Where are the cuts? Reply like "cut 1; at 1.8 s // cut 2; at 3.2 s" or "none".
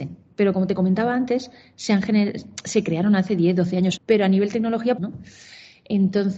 cut 1; at 4.0 s // cut 2; at 5.0 s